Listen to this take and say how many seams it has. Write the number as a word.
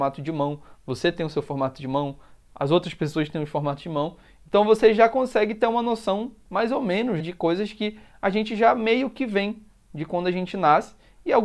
one